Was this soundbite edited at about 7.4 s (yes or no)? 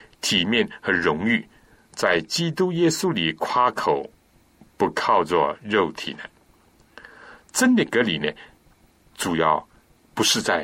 no